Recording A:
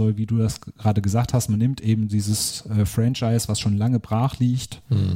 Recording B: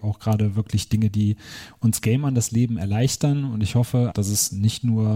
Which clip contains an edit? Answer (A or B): B